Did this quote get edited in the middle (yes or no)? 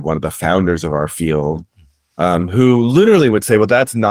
no